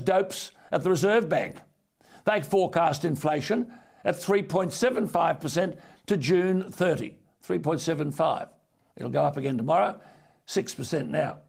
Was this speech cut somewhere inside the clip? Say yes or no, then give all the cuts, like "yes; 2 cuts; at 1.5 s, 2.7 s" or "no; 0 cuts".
no; 0 cuts